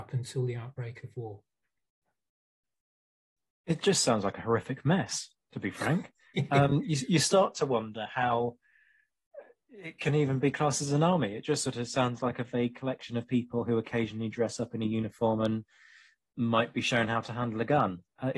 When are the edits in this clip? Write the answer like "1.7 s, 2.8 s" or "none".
none